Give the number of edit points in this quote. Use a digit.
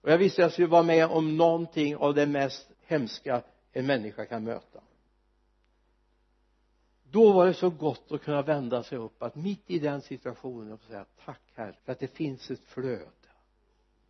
2